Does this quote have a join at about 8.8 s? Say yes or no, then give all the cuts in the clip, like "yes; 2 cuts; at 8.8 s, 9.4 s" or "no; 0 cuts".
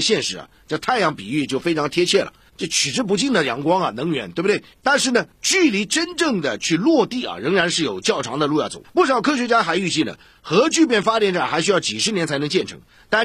yes; 1 cut; at 8.8 s